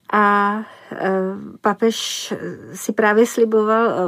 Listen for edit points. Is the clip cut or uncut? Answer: cut